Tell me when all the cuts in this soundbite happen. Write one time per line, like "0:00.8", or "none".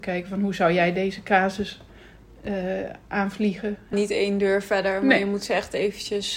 0:03.9